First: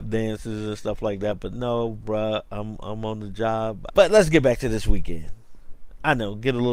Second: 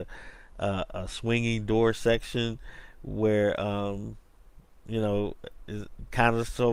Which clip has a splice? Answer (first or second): first